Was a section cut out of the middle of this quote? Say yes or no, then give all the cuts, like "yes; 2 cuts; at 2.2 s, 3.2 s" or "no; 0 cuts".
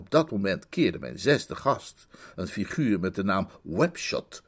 no; 0 cuts